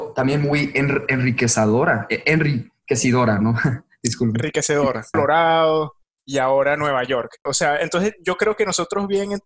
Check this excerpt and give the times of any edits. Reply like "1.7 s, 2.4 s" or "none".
5.1 s, 7.5 s